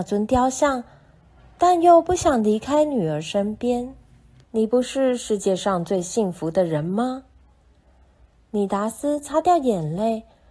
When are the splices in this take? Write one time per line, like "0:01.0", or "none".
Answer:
0:04.4